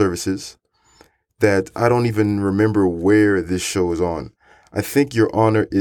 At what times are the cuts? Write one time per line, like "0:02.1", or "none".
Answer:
none